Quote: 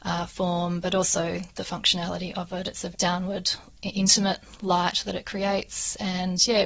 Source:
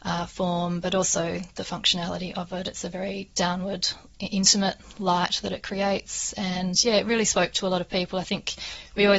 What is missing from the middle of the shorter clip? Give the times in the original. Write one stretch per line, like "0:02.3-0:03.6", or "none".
0:02.9-0:03.3